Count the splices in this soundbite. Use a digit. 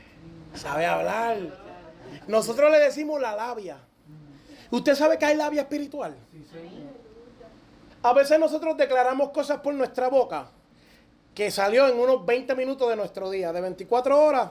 1